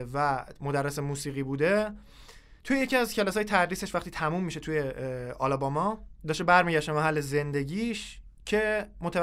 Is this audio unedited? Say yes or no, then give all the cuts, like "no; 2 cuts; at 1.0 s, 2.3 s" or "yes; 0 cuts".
no; 1 cut; at 2.6 s